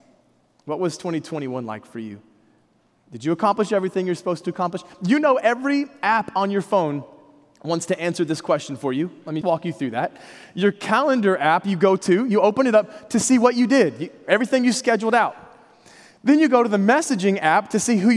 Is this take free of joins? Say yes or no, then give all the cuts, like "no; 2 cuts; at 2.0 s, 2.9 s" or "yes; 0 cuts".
no; 1 cut; at 9.4 s